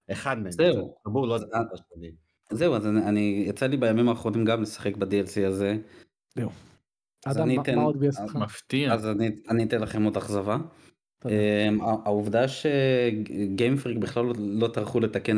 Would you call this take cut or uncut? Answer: cut